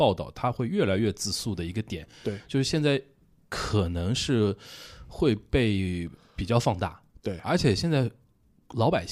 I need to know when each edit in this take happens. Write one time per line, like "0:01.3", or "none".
none